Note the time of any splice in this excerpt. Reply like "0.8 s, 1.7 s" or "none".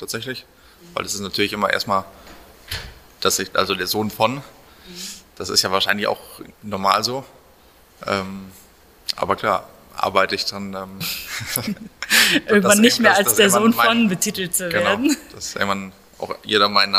6.5 s